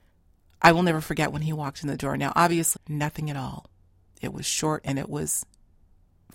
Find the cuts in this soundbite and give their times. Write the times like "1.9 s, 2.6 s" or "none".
2.7 s, 4.8 s

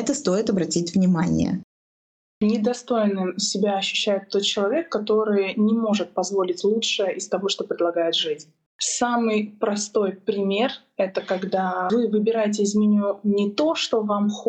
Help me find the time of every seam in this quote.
none

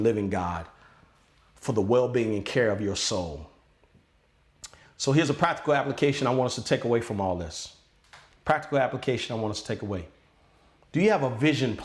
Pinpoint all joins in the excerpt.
none

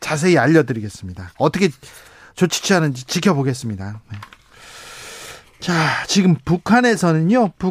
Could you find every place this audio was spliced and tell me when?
none

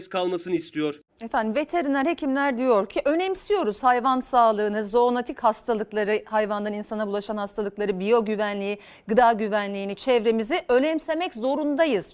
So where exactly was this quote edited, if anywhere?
1.1 s

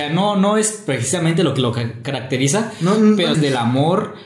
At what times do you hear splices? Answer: 3.3 s

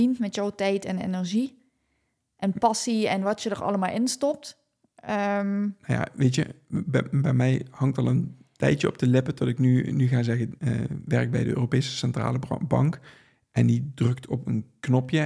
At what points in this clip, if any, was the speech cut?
10.6 s

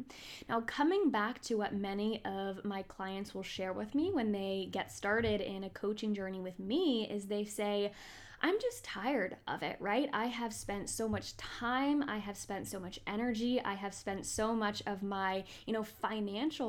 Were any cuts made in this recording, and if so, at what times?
none

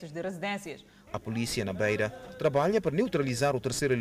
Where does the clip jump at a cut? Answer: 1.1 s

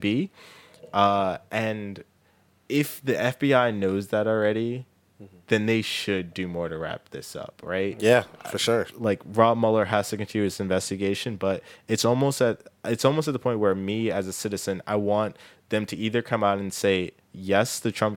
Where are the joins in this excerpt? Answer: none

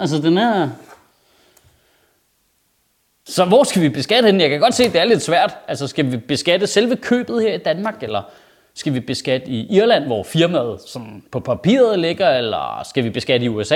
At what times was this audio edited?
none

